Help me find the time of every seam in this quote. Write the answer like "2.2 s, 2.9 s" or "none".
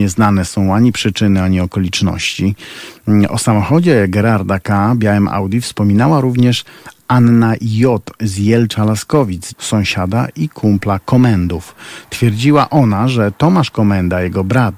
9.5 s